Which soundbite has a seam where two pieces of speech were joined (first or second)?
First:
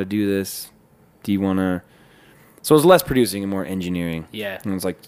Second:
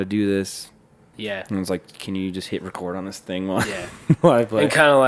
second